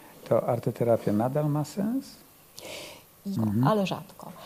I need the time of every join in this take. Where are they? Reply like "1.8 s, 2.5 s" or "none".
3.4 s

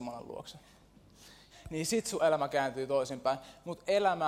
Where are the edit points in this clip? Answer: 1.5 s

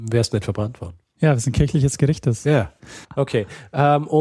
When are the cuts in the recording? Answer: 3.0 s

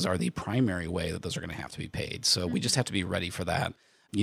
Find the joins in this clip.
none

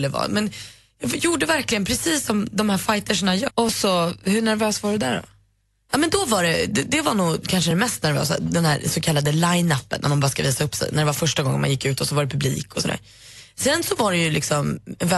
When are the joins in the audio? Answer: 3.5 s

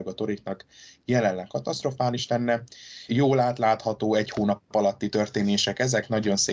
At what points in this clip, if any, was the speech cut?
3.1 s

